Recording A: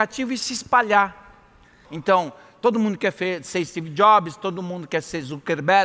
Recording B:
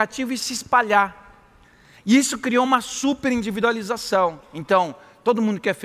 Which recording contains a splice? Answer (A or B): A